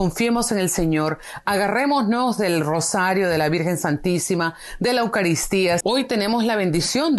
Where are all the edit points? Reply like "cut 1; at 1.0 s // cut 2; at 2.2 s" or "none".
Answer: cut 1; at 5.8 s